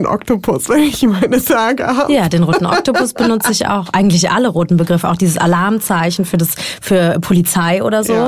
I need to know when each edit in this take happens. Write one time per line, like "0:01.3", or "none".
none